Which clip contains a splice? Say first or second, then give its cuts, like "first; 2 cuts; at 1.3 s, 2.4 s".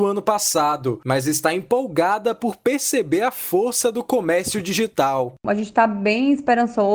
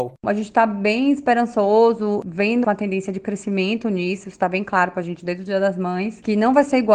second; 1 cut; at 2.6 s